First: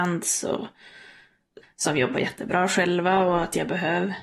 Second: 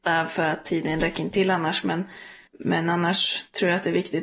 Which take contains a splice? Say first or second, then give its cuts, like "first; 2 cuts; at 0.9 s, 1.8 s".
first; 1 cut; at 1.6 s